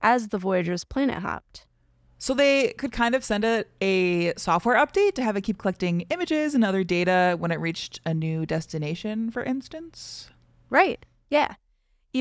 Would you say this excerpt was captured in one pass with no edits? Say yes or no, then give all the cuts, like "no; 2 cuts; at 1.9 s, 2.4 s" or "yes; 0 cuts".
yes; 0 cuts